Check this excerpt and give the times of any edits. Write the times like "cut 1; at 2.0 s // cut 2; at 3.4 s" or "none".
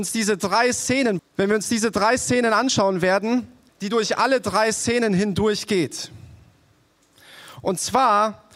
cut 1; at 1.2 s // cut 2; at 3.7 s